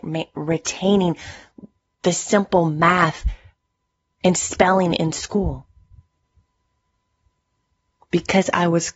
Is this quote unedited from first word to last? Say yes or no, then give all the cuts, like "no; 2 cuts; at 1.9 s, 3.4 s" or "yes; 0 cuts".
yes; 0 cuts